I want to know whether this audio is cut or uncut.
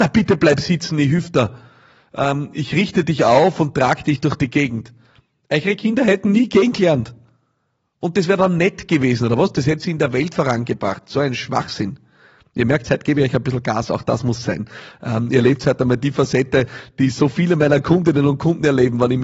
uncut